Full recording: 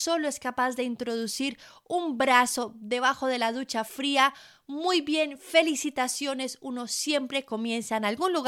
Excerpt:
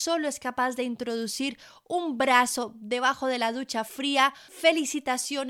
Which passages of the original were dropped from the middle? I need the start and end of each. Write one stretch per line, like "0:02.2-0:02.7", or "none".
0:04.5-0:05.4